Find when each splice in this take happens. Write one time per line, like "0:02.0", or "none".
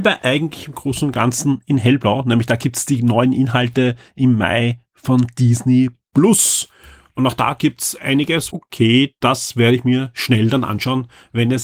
0:08.5